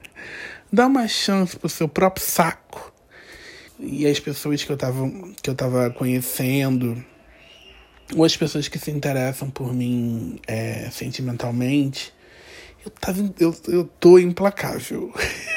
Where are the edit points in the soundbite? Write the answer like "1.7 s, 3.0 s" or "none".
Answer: 3.7 s